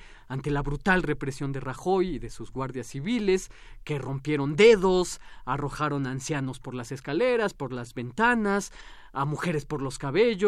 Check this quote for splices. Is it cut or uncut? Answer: uncut